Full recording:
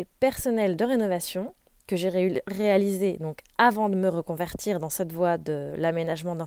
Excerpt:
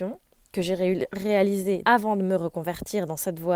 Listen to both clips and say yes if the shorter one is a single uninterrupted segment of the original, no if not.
no